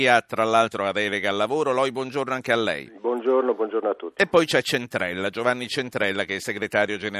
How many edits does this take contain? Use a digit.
0